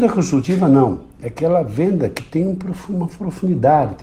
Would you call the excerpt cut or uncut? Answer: uncut